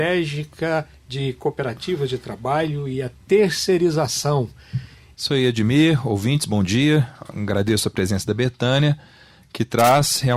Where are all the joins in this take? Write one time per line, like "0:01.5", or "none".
0:05.1